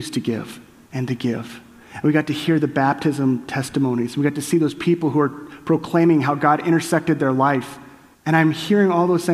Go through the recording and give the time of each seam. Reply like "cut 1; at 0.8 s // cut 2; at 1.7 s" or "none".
cut 1; at 8.1 s